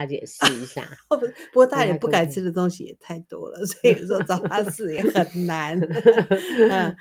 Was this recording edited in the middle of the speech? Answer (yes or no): no